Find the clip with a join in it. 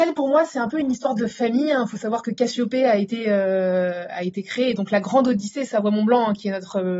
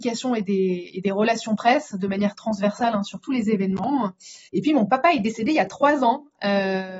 second; 1 cut; at 4.5 s

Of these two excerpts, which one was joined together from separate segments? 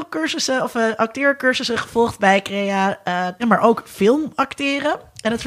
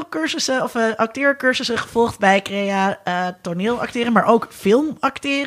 first; 1 cut; at 3.4 s

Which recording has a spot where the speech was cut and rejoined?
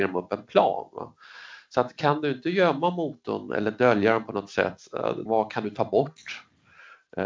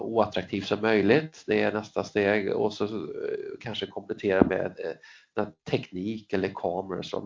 first; 1 cut; at 5.3 s

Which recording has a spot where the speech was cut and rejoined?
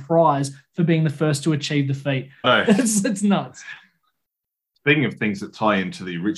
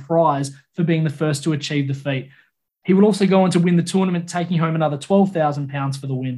first; 1 cut; at 2.4 s

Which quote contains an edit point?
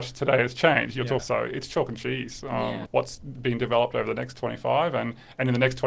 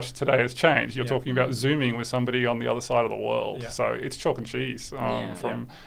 first; 2 cuts; at 1.2 s, 2.9 s

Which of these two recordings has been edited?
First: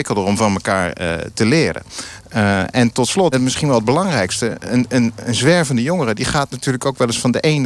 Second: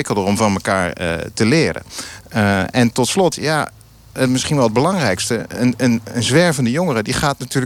first; 1 cut; at 3.3 s

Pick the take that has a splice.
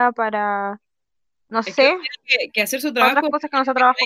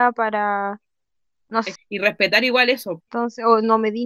second; 2 cuts; at 1.8 s, 3.0 s

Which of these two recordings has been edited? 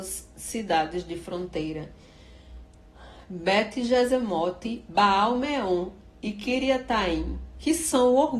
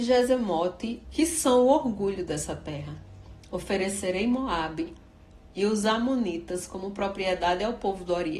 second; 1 cut; at 1.0 s

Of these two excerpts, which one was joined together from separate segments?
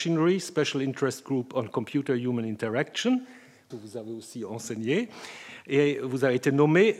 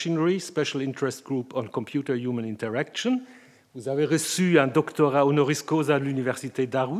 first; 1 cut; at 3.7 s

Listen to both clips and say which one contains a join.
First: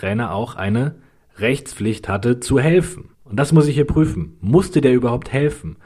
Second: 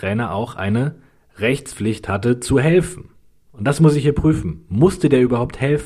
first; 1 cut; at 3.1 s

